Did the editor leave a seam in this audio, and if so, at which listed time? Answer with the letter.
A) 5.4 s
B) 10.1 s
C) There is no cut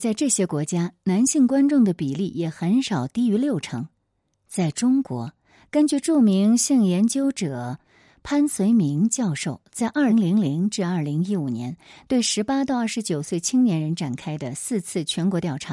B